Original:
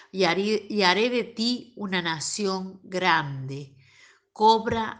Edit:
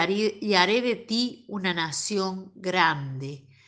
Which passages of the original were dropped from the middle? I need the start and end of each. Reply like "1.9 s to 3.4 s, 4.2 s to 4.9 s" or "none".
none